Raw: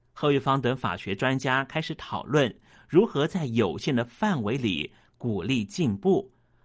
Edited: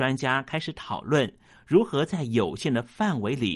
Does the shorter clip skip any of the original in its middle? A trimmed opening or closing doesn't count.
no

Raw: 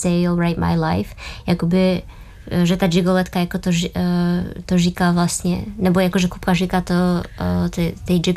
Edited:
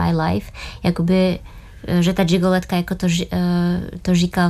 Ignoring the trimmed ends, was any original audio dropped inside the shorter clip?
no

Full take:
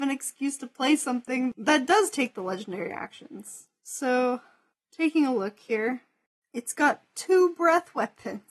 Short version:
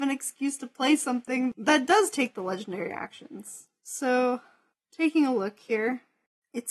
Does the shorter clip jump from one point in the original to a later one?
no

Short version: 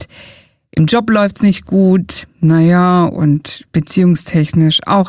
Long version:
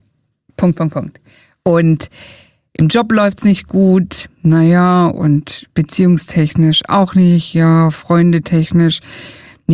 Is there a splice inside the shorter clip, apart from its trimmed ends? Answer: no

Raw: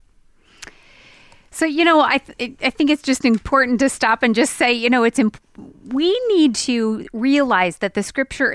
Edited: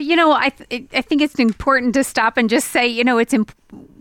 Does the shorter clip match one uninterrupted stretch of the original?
no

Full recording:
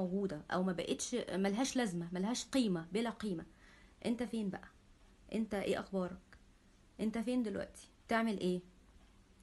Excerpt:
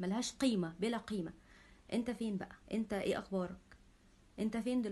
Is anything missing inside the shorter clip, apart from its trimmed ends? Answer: yes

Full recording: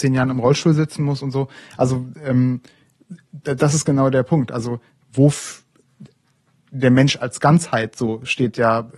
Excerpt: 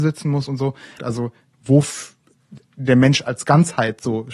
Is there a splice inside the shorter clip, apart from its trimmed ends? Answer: yes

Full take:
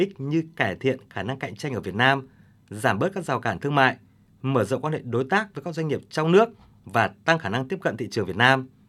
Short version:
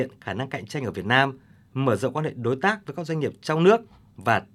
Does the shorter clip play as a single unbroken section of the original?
no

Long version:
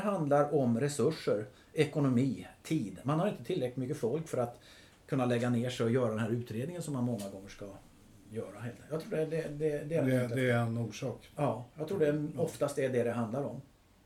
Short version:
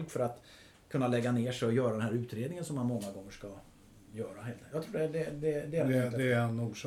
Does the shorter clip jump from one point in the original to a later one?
no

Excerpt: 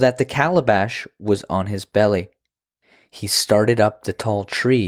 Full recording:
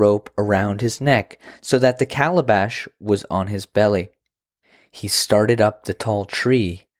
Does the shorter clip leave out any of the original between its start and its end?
no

